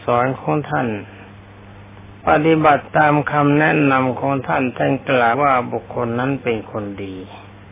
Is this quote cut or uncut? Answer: cut